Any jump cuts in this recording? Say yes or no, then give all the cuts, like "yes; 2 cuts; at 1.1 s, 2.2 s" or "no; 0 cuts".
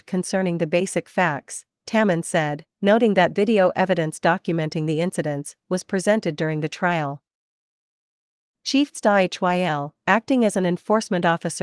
no; 0 cuts